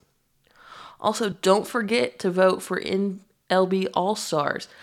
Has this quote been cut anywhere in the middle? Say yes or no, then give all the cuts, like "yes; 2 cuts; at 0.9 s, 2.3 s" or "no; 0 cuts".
no; 0 cuts